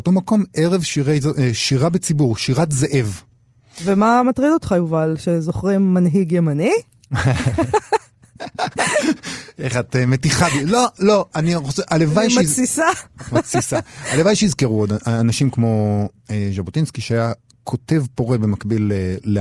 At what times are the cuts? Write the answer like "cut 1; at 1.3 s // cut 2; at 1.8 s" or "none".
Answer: none

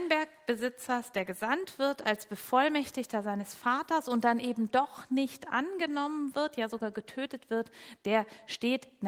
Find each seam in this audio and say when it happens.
none

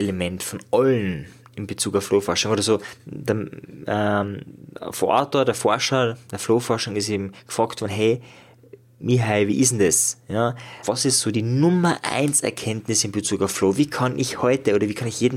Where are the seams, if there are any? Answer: cut 1; at 10.8 s

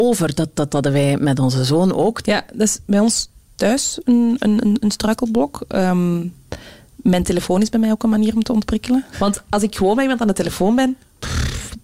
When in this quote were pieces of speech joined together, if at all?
cut 1; at 2.2 s // cut 2; at 9.1 s

